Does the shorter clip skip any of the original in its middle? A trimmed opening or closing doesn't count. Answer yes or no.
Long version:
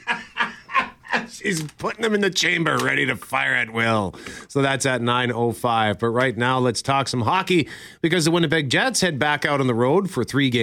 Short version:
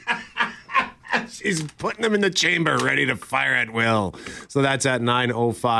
no